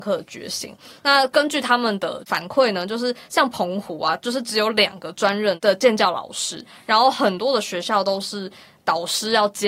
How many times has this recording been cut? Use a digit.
0